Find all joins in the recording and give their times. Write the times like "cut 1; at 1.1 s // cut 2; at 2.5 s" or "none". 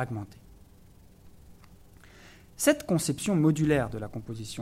none